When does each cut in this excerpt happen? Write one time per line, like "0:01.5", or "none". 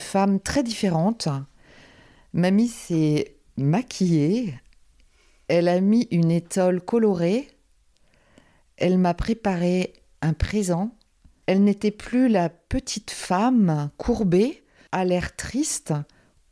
0:11.4
0:14.9